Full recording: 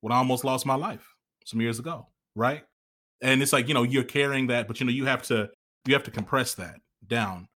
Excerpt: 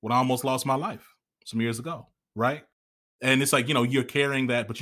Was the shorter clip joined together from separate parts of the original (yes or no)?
no